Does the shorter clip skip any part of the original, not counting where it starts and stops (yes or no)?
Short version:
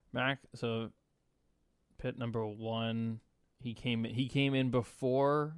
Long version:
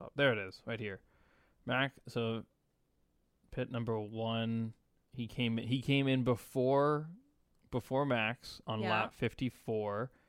no